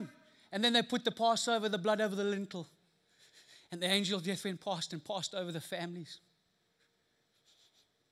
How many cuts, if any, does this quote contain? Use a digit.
0